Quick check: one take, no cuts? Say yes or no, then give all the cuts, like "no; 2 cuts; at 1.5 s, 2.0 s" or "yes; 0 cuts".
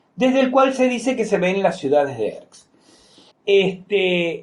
no; 1 cut; at 3.3 s